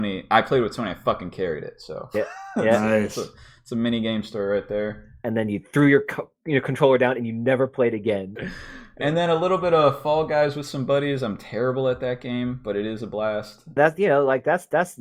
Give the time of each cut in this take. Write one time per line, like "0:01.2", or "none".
0:08.4
0:13.8